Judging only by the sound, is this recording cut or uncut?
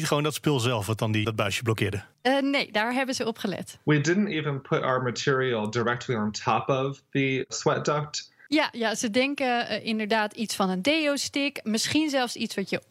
cut